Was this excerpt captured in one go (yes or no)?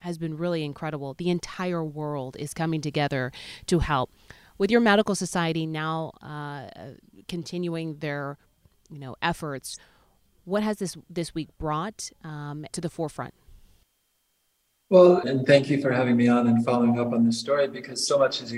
no